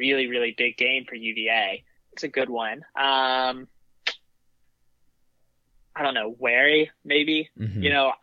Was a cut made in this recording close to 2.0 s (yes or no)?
yes